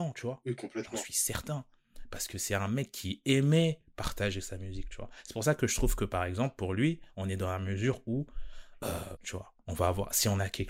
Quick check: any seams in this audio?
yes; 1 cut; at 9.2 s

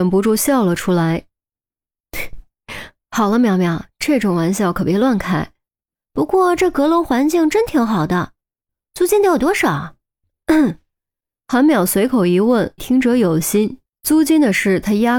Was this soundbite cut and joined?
yes; 3 cuts; at 5.9 s, 12.8 s, 13.9 s

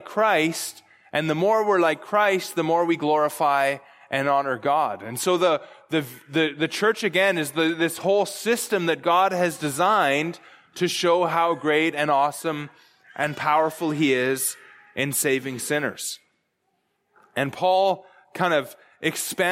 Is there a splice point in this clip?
no; 0 cuts

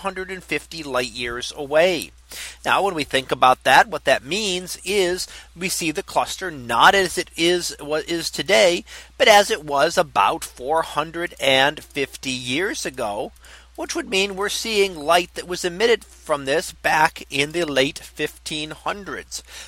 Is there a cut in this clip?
no; 0 cuts

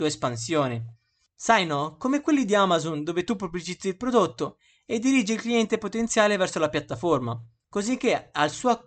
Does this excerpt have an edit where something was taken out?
yes; 1 cut; at 1.4 s

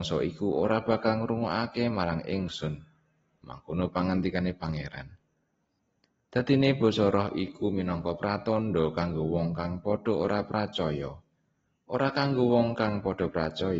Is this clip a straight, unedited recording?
yes; 0 cuts

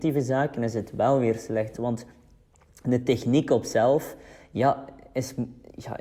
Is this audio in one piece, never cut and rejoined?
no; 1 cut; at 1.7 s

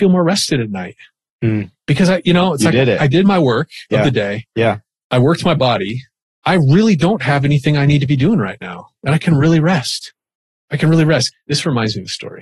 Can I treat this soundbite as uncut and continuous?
yes; 0 cuts

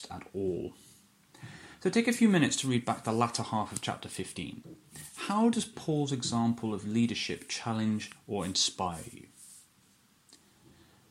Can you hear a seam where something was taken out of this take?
no; 0 cuts

